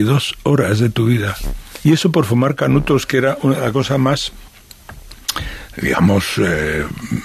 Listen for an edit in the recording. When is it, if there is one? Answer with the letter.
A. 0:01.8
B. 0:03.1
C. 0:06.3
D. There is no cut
A